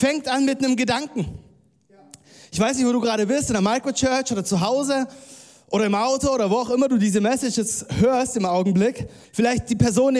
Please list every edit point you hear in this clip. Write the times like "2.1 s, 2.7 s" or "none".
9.2 s